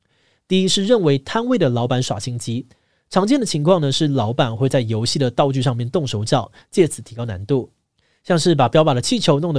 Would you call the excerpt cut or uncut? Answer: uncut